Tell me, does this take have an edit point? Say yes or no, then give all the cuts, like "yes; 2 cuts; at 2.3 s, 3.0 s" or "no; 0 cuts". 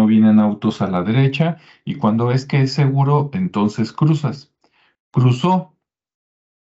no; 0 cuts